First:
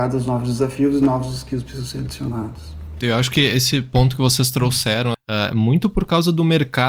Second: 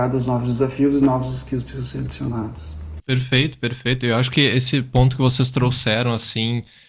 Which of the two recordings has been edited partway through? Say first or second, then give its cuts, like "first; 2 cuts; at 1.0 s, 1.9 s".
first; 2 cuts; at 3.0 s, 5.1 s